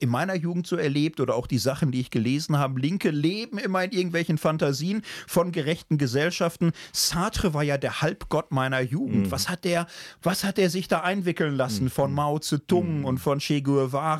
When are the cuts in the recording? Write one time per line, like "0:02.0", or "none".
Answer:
0:10.2